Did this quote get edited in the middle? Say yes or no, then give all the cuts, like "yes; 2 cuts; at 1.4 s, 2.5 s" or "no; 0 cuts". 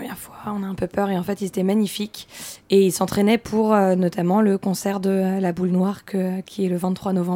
no; 0 cuts